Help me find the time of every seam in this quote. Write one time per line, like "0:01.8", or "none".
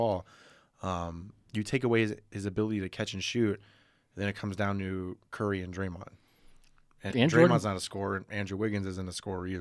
0:05.2
0:07.1